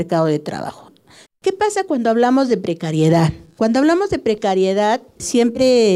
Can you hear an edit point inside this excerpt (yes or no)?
yes